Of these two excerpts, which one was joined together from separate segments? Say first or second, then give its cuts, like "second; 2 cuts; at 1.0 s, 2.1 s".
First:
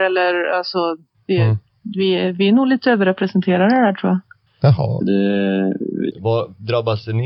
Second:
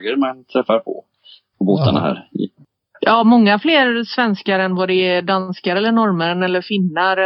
first; 2 cuts; at 4.5 s, 6.1 s